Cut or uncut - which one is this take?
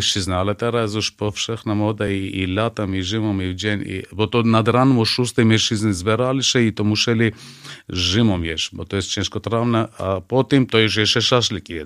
uncut